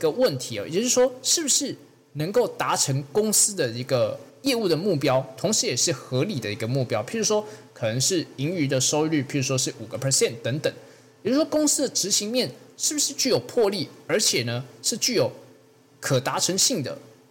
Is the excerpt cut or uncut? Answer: uncut